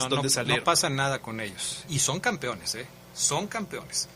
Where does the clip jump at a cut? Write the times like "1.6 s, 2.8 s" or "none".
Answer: 1.9 s